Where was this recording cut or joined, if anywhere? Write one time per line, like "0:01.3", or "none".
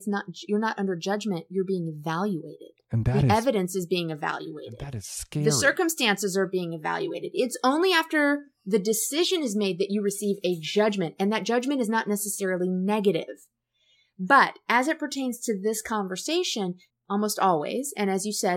0:16.9